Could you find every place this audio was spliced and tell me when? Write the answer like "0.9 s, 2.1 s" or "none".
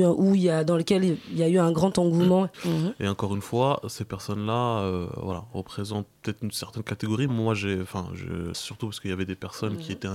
2.5 s, 7.3 s, 8.5 s